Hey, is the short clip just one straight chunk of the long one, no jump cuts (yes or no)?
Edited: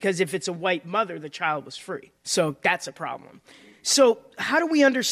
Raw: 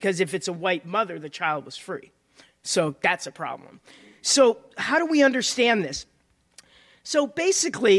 no